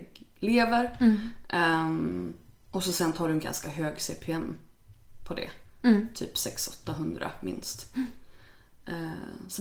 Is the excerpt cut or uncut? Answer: uncut